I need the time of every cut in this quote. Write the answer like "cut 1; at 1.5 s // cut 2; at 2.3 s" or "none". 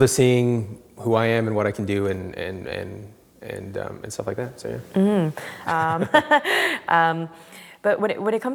cut 1; at 5.7 s